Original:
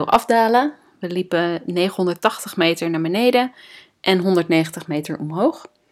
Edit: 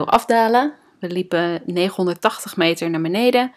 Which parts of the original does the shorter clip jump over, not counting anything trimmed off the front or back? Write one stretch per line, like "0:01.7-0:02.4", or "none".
none